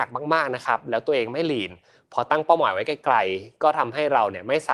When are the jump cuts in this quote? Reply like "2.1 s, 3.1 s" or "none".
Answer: none